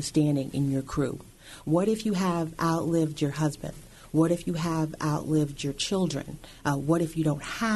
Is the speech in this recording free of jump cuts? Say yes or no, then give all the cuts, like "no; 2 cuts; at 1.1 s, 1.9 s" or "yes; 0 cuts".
yes; 0 cuts